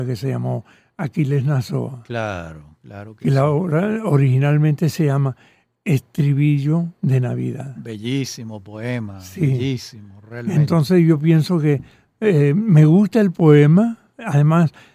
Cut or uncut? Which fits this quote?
uncut